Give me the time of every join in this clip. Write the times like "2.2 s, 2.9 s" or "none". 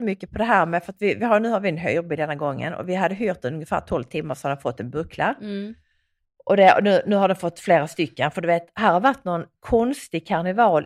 none